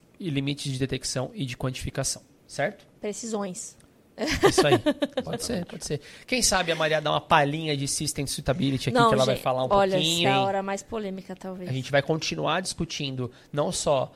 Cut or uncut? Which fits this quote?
cut